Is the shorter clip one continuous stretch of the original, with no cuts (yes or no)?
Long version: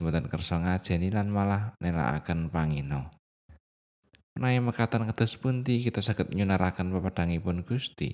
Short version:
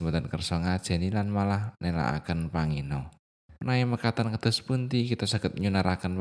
no